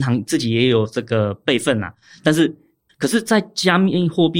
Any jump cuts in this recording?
yes; 1 cut; at 2.9 s

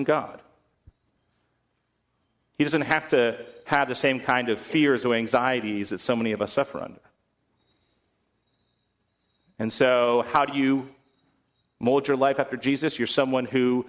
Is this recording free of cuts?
yes; 0 cuts

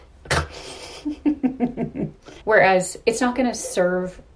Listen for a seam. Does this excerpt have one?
yes; 1 cut; at 2.4 s

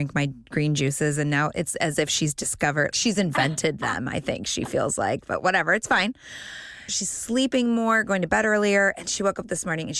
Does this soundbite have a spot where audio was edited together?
yes; 2 cuts; at 2.9 s, 6.9 s

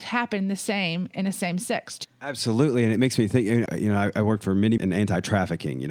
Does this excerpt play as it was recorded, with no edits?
no; 3 cuts; at 2.0 s, 3.7 s, 4.8 s

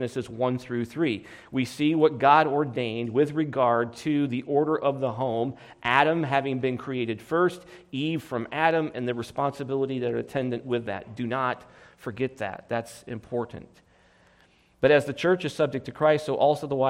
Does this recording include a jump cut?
no; 0 cuts

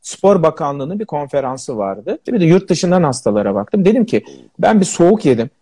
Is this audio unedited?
no; 1 cut; at 2.3 s

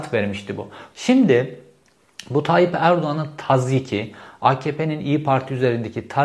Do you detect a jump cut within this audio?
yes; 1 cut; at 0.9 s

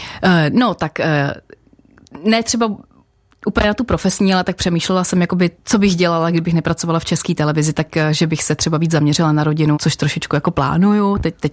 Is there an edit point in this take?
yes; 2 cuts; at 5.5 s, 9.7 s

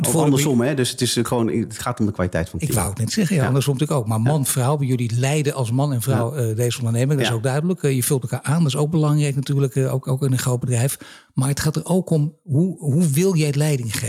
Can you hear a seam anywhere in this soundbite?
no; 0 cuts

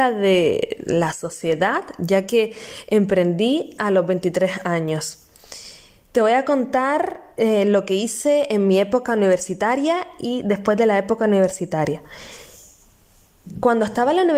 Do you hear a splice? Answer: no; 0 cuts

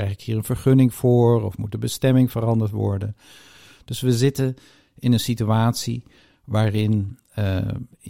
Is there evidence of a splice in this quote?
no; 0 cuts

